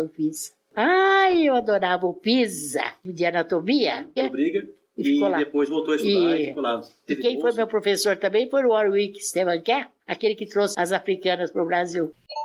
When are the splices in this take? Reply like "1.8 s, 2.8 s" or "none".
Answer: 4.2 s